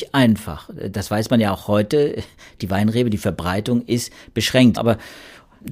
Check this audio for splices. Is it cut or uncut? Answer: cut